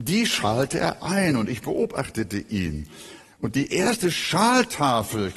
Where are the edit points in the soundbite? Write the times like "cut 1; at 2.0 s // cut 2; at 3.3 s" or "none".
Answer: none